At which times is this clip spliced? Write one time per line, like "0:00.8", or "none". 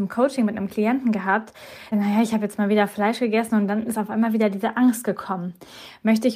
0:01.9